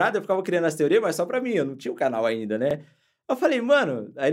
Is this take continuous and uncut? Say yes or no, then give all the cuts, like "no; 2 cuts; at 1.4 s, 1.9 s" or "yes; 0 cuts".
yes; 0 cuts